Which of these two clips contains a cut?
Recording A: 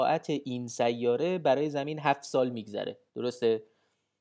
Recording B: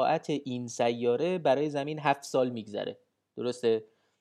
A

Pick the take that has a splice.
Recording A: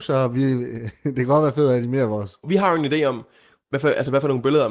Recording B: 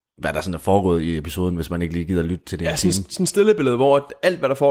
A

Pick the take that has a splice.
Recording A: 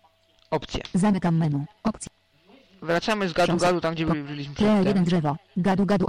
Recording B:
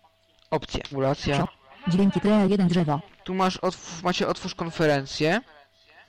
B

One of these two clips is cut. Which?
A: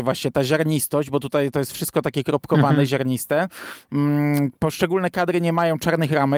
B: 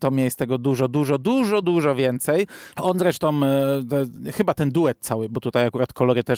B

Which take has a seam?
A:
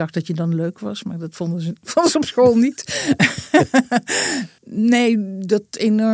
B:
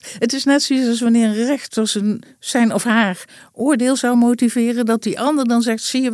A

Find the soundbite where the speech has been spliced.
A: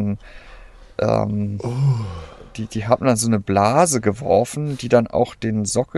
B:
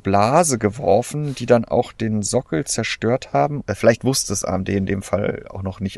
B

